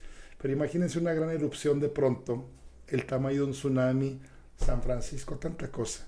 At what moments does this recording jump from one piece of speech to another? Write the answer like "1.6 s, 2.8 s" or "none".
2.7 s